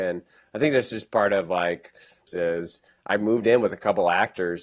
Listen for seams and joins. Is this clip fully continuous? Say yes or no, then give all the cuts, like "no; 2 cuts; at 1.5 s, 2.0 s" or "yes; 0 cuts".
no; 1 cut; at 2.3 s